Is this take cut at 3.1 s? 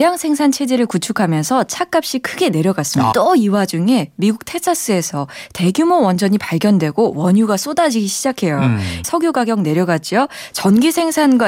yes; 3 cuts; at 3.1 s, 9.0 s, 10.5 s

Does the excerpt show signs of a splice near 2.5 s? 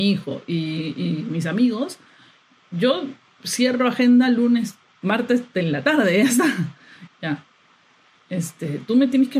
no; 1 cut; at 7.1 s

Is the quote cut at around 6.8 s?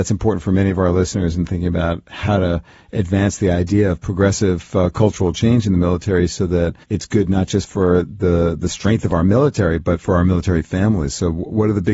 yes; 1 cut; at 6.8 s

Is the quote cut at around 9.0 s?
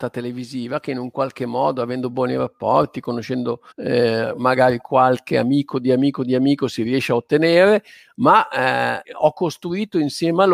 yes; 2 cuts; at 3.7 s, 9.0 s

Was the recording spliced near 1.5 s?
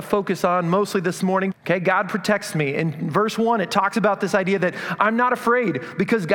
yes; 1 cut; at 1.5 s

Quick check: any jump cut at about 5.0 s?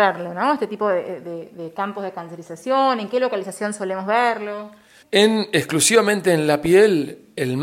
yes; 1 cut; at 5.0 s

